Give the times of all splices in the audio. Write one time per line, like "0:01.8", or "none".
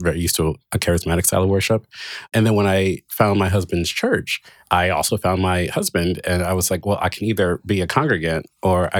none